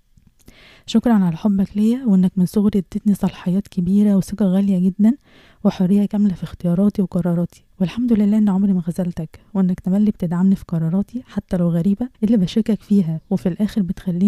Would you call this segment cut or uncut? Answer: cut